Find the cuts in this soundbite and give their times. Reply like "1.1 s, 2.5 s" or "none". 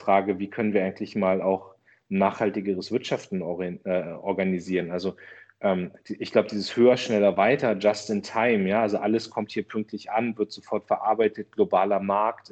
none